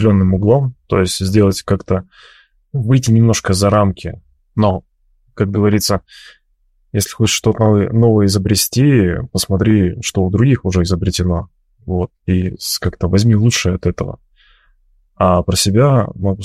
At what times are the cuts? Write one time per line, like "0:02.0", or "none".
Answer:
0:04.4